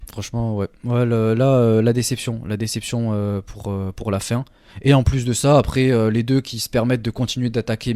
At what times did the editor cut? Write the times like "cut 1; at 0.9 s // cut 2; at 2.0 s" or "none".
none